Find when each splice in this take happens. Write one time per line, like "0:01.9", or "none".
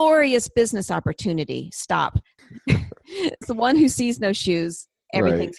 0:02.4
0:03.4